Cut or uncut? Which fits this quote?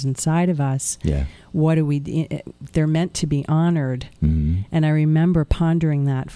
uncut